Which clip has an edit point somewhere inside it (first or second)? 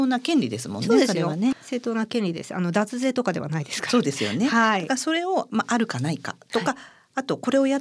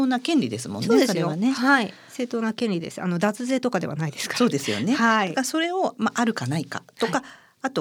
first